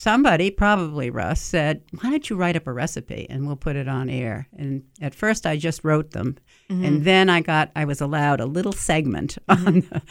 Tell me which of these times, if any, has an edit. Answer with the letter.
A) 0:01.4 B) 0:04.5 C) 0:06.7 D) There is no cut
D